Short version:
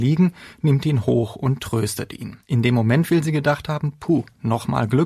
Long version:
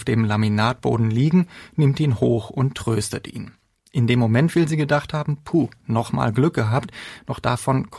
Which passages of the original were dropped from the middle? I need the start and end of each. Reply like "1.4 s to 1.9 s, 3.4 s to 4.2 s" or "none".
3.6 s to 3.9 s